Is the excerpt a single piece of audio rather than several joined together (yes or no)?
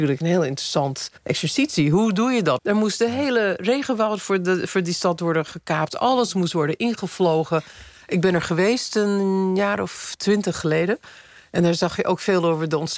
no